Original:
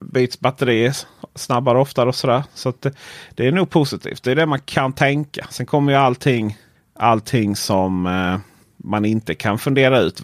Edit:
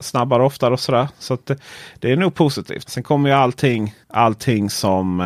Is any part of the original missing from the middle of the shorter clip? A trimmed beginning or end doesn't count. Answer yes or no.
yes